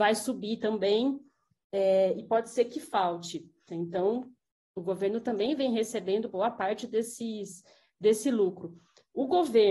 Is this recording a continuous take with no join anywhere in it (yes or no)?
no